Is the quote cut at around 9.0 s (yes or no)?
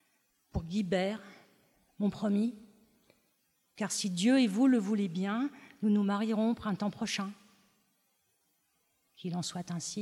no